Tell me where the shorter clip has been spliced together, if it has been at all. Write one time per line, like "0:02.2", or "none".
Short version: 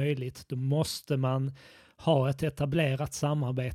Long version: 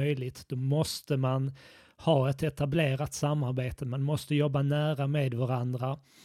none